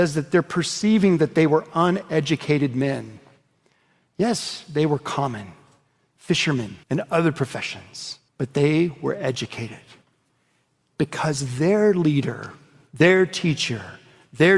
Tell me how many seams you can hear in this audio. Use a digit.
3